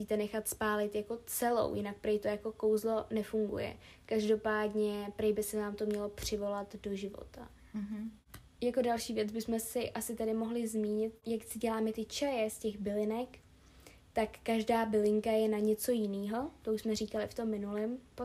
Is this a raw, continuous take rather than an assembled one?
yes; 0 cuts

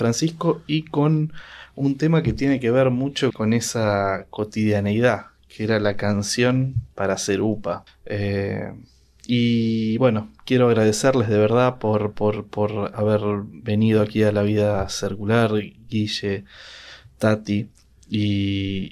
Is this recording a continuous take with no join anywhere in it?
no; 2 cuts; at 3.3 s, 7.9 s

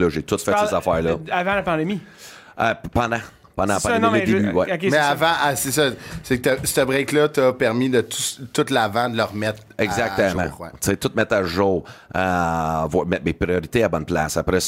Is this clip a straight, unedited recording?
yes; 0 cuts

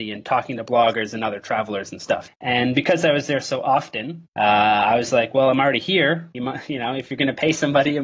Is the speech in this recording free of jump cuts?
no; 3 cuts; at 2.3 s, 4.3 s, 6.3 s

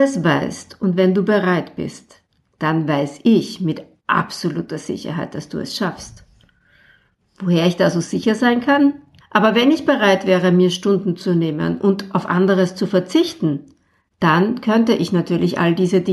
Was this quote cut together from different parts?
yes; 1 cut; at 9.2 s

